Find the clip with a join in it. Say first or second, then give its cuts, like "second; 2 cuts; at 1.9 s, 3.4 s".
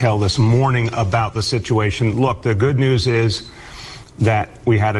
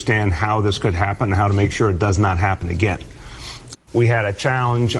second; 1 cut; at 3.7 s